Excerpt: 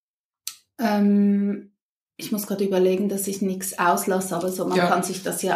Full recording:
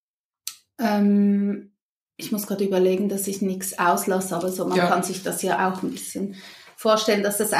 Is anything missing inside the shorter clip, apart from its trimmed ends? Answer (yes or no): no